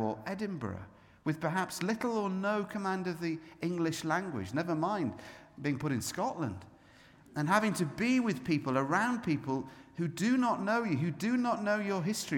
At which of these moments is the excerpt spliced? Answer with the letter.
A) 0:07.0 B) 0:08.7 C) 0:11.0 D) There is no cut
D